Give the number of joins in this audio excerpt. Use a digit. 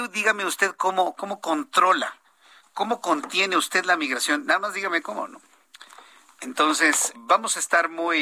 1